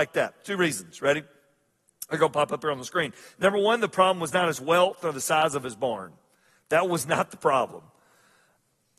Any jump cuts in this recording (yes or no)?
no